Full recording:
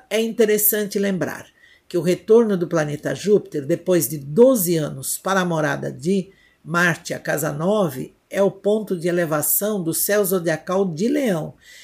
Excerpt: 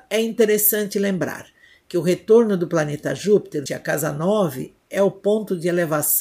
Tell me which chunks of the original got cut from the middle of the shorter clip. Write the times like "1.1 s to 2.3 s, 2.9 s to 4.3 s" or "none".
3.7 s to 7.1 s